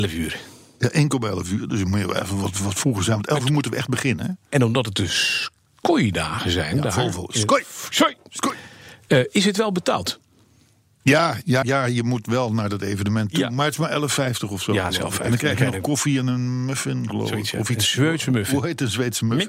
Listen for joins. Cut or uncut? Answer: cut